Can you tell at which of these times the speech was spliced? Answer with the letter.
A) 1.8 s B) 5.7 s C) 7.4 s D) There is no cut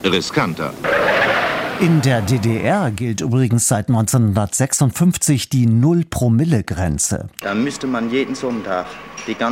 C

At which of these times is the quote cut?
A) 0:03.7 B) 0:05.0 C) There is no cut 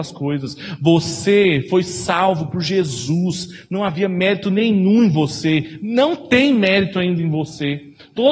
C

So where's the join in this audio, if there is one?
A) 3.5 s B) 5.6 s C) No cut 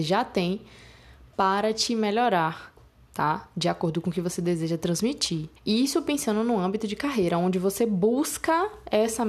B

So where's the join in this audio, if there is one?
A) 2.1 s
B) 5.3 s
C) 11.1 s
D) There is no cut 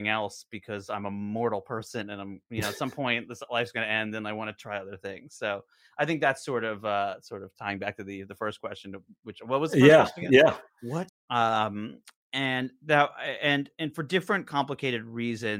C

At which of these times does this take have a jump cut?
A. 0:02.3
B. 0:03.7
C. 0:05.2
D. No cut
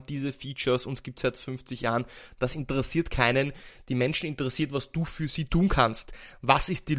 D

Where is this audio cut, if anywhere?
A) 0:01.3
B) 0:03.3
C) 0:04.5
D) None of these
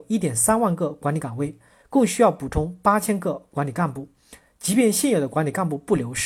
D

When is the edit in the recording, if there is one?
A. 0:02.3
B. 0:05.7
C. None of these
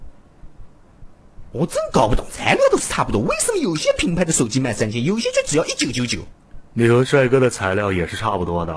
C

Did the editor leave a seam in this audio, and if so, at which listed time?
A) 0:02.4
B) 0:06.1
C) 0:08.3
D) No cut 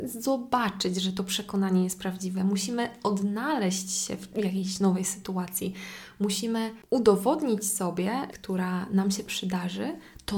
C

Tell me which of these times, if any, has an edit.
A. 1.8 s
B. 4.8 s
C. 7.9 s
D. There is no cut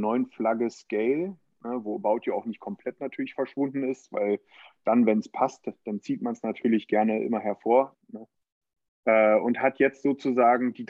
C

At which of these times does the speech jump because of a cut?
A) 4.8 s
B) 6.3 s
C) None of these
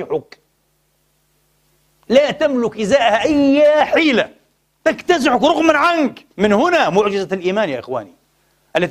B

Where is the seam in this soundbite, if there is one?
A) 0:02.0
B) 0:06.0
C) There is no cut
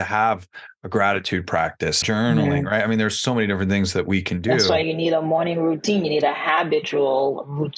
A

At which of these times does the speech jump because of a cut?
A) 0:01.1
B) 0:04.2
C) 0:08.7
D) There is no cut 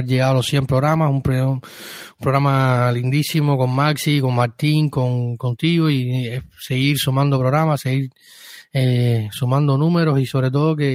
D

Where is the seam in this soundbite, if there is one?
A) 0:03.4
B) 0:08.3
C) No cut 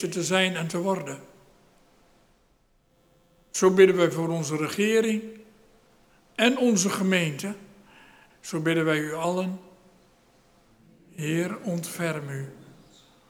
B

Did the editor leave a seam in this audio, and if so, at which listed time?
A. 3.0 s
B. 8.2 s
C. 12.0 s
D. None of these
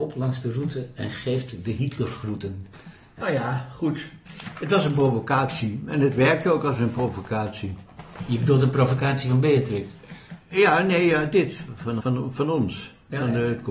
C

